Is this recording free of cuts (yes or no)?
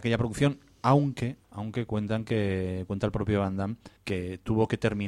no